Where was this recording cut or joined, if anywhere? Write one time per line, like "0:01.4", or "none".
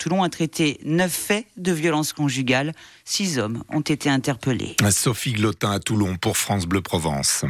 none